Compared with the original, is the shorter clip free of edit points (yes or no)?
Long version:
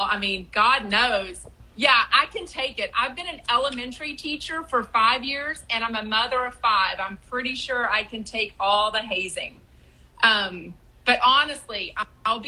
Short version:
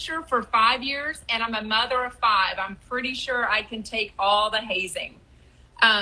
yes